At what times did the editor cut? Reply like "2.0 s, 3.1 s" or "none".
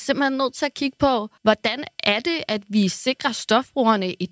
1.4 s